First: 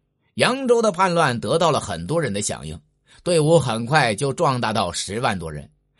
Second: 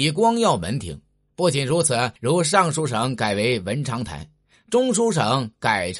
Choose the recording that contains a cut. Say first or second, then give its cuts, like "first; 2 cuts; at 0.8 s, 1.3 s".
second; 1 cut; at 2.2 s